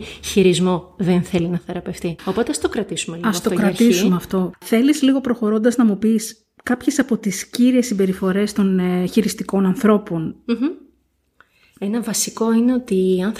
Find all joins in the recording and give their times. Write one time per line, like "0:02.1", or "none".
none